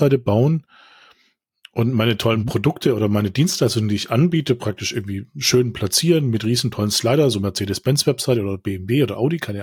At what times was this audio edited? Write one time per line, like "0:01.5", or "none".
none